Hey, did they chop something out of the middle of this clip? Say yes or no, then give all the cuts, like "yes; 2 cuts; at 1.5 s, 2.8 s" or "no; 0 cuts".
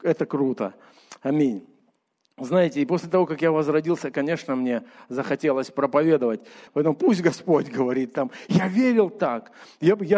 yes; 1 cut; at 6.7 s